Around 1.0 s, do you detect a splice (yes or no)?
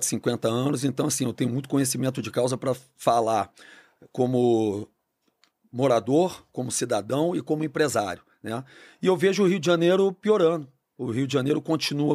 no